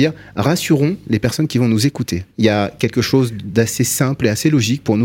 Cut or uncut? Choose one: cut